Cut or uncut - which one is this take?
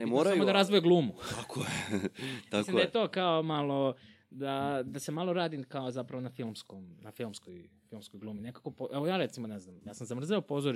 uncut